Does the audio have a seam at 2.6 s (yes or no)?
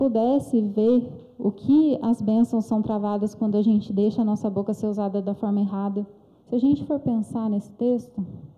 no